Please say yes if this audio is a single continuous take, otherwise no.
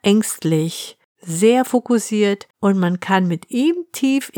no